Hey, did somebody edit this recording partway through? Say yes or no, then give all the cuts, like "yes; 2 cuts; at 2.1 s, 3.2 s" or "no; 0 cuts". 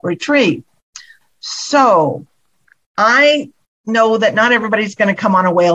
no; 0 cuts